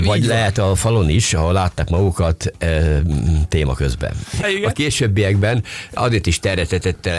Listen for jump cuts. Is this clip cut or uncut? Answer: cut